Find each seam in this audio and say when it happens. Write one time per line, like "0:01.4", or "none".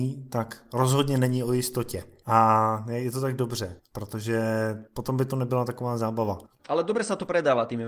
0:02.2
0:06.6